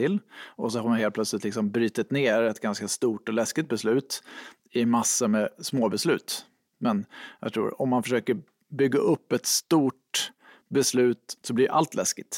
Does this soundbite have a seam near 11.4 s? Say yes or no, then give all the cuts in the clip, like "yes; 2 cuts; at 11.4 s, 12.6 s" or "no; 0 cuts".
yes; 2 cuts; at 6.7 s, 11.4 s